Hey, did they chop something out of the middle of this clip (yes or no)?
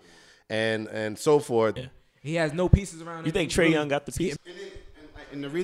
yes